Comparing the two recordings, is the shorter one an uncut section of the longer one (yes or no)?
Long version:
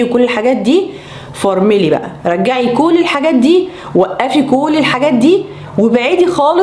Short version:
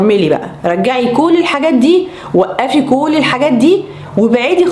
yes